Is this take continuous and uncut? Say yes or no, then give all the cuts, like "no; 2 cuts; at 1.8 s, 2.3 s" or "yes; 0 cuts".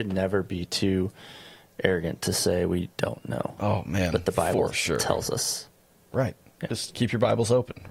yes; 0 cuts